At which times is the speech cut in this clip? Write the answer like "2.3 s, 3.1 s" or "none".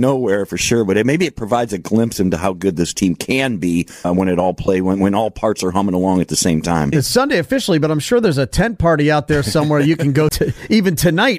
4.0 s, 6.9 s, 10.3 s